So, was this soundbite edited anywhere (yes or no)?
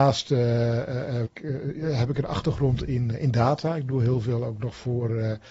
yes